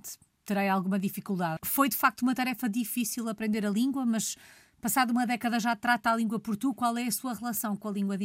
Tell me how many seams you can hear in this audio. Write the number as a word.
one